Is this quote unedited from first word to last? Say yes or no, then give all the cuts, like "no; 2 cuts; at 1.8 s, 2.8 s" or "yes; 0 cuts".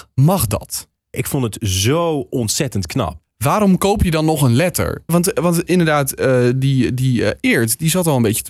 no; 3 cuts; at 1.1 s, 3.2 s, 5.1 s